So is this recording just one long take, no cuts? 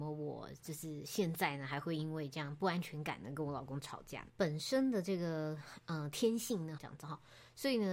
no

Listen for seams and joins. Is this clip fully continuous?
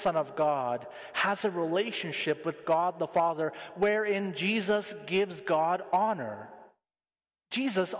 yes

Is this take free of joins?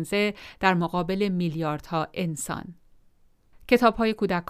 no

